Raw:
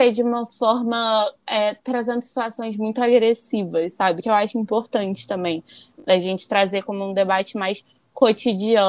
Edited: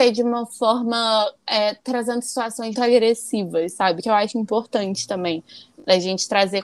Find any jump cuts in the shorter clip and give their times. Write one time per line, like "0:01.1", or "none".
0:02.7